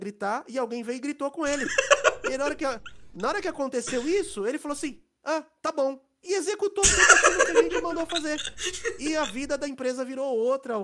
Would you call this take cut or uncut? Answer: uncut